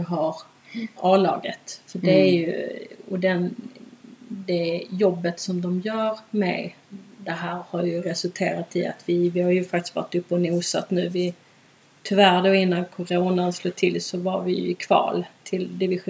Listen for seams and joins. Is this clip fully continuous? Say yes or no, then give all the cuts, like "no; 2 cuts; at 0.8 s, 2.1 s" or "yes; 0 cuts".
yes; 0 cuts